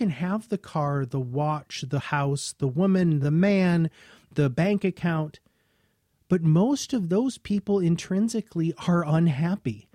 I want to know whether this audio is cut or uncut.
uncut